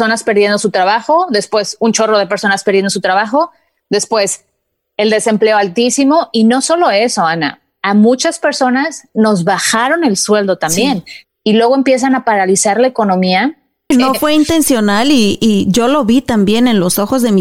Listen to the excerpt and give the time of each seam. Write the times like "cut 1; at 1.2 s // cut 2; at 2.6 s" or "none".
cut 1; at 11.2 s // cut 2; at 13.9 s